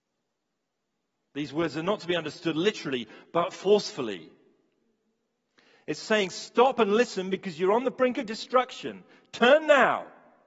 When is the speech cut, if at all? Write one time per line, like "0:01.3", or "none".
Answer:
none